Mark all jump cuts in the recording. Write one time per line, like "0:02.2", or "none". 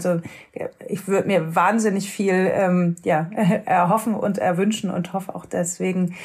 none